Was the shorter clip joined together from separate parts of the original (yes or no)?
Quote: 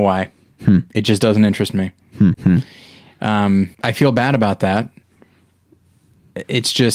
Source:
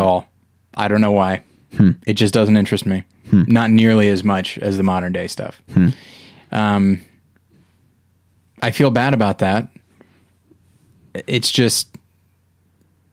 yes